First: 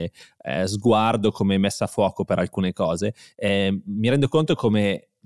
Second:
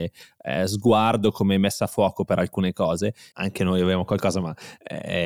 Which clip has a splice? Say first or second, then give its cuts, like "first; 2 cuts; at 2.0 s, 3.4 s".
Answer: second; 1 cut; at 3.3 s